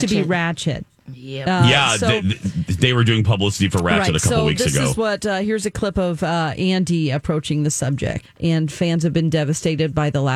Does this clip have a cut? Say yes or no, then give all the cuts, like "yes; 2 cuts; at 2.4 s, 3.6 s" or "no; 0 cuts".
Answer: yes; 1 cut; at 8.2 s